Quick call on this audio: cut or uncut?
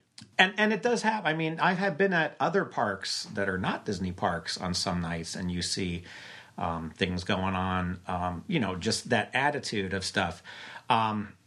uncut